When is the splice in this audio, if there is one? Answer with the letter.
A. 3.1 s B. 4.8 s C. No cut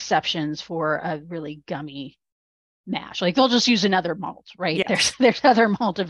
C